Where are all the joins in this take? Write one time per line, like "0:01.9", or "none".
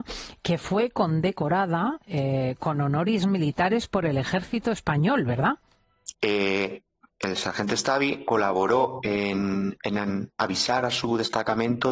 0:06.1